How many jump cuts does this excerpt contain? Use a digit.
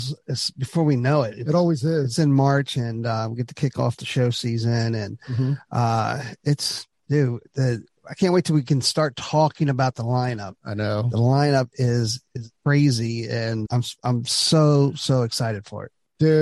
2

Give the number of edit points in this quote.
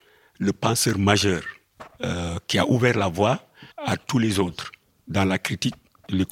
1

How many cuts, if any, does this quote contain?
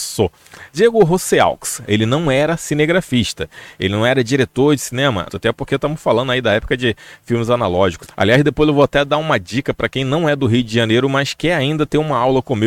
3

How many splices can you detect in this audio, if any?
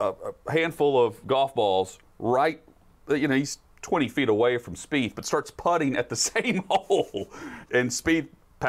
1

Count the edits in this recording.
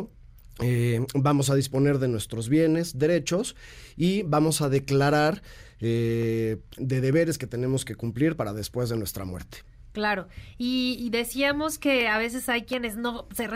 1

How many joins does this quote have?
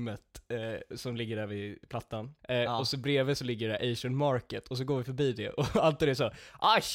1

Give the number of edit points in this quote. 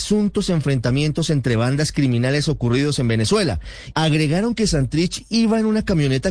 1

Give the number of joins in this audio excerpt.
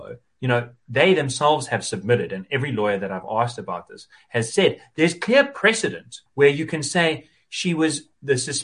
1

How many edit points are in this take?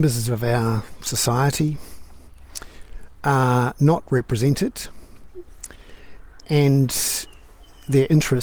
0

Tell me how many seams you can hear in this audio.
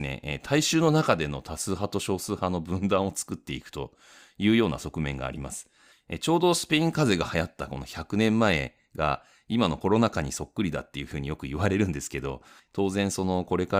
2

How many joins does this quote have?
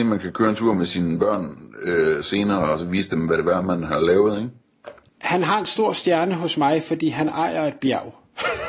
1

